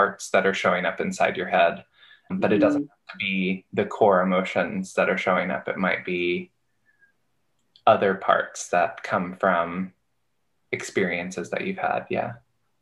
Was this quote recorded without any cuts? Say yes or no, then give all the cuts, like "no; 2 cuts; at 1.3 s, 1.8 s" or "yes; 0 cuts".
yes; 0 cuts